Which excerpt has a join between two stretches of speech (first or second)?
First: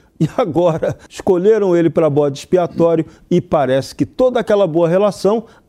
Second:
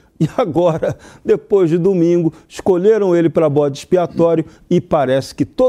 first